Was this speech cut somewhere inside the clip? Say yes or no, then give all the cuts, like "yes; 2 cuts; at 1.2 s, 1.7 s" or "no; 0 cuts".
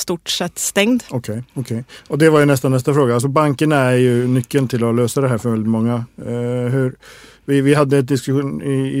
yes; 1 cut; at 1.1 s